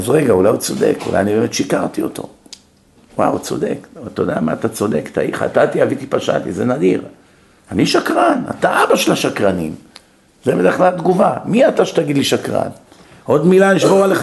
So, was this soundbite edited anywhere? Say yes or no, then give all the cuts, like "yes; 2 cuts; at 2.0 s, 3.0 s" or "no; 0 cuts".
no; 0 cuts